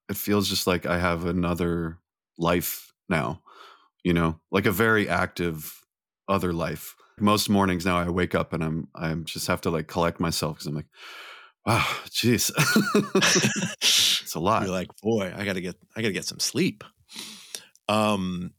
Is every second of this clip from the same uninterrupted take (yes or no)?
no